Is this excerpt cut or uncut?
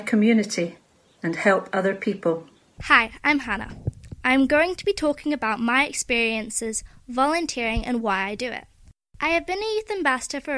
cut